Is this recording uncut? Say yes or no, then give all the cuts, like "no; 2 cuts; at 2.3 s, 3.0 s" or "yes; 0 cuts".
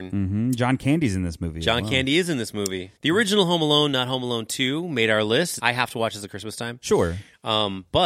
no; 2 cuts; at 3.0 s, 5.6 s